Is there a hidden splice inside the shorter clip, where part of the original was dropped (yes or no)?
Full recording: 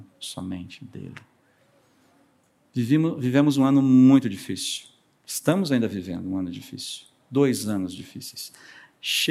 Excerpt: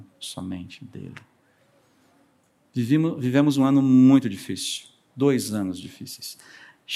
yes